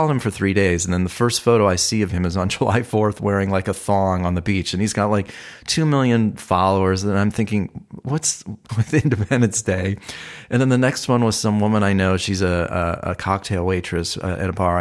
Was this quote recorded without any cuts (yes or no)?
no